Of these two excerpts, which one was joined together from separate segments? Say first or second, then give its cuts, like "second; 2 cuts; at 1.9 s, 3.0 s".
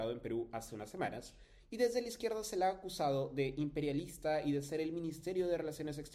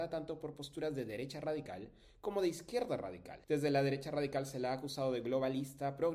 second; 1 cut; at 3.4 s